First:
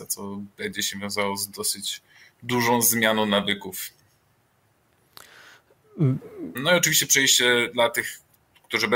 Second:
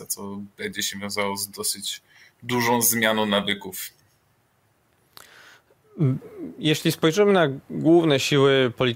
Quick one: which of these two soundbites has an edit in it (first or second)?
first